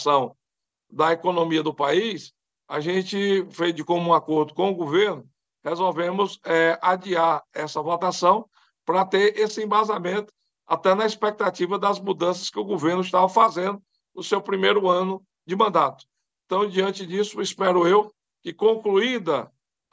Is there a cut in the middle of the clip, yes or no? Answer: no